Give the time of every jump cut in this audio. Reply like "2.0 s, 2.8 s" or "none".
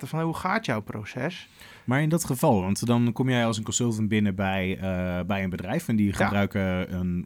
none